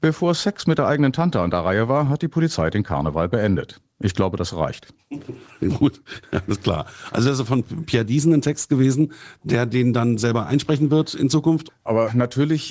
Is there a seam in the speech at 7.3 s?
no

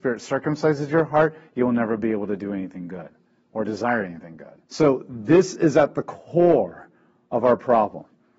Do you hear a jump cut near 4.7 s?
yes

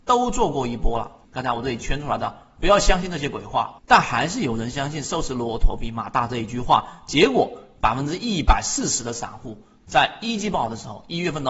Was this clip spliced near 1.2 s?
yes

